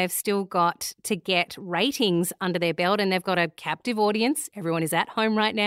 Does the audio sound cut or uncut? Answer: uncut